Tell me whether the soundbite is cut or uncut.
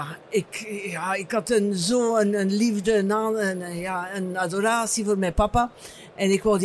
uncut